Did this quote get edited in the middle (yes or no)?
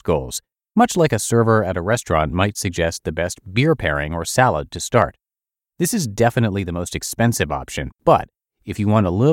no